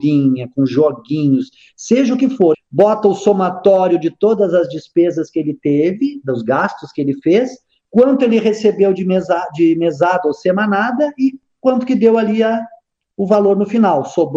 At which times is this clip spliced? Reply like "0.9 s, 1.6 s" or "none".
2.5 s